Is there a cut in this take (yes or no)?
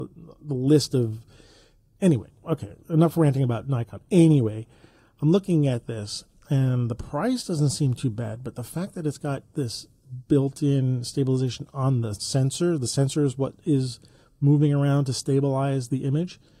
no